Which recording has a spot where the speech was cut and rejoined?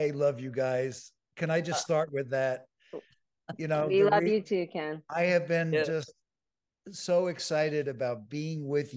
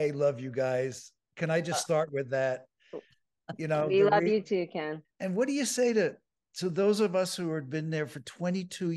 second; 1 cut; at 5.0 s

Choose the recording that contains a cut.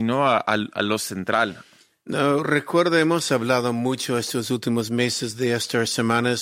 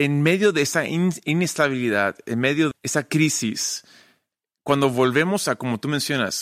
second; 1 cut; at 2.7 s

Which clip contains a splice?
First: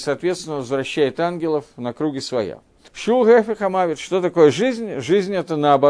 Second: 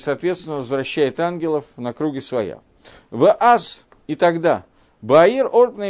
first; 1 cut; at 2.9 s

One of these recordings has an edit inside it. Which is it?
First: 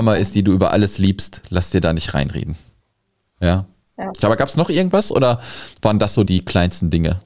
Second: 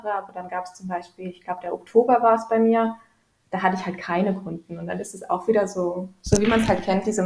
first; 2 cuts; at 4.2 s, 6.3 s

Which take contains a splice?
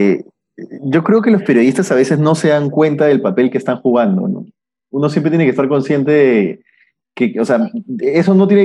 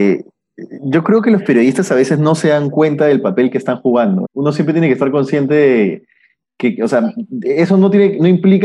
second; 1 cut; at 4.2 s

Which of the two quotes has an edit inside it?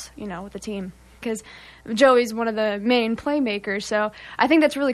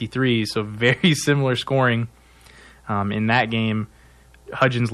first; 1 cut; at 1.2 s

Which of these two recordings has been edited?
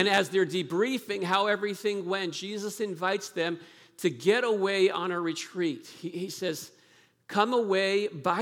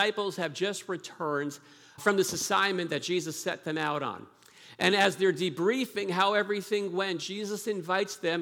second; 1 cut; at 2.0 s

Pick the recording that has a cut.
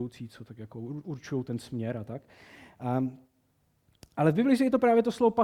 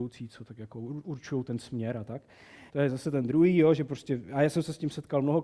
second; 1 cut; at 2.7 s

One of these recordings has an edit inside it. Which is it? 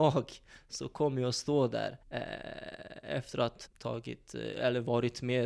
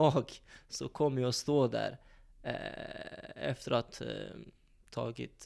first; 2 cuts; at 2.0 s, 3.7 s

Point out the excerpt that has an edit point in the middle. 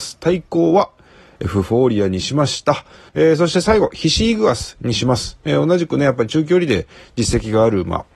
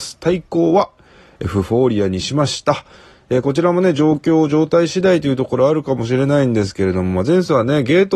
first; 1 cut; at 3.1 s

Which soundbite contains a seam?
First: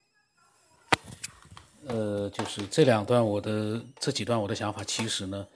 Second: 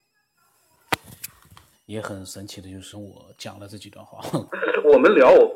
second; 3 cuts; at 1.7 s, 2.9 s, 4.5 s

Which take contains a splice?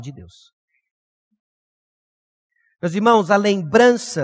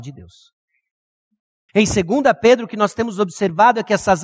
second; 1 cut; at 1.7 s

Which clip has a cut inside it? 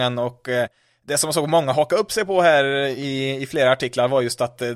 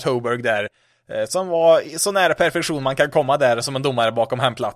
second; 1 cut; at 3.6 s

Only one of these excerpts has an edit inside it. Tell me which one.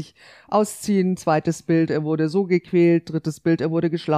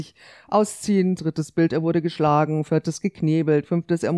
second; 1 cut; at 1.2 s

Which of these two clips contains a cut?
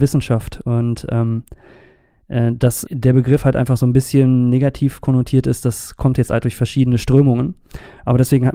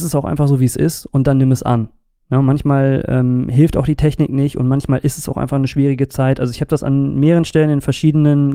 first; 2 cuts; at 2.9 s, 6.4 s

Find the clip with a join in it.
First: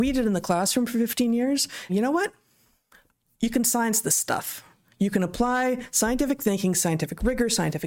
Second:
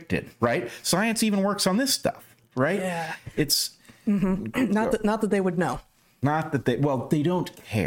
first; 1 cut; at 1.9 s

